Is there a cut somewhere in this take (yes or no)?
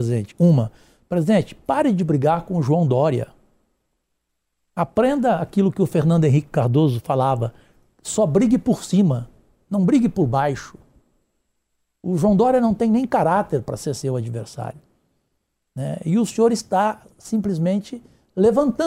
no